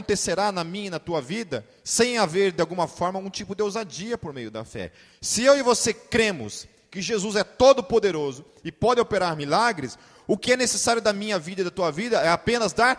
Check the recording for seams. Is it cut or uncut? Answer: uncut